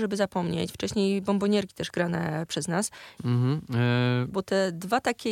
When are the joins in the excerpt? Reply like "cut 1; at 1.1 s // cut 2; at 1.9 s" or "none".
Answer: cut 1; at 3.2 s // cut 2; at 4.3 s